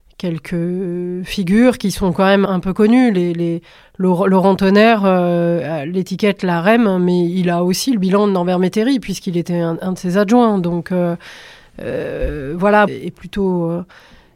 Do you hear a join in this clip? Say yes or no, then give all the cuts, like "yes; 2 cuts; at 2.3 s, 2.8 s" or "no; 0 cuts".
yes; 2 cuts; at 2.5 s, 12.9 s